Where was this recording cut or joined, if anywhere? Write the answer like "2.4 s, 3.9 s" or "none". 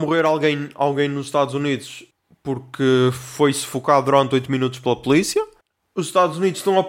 none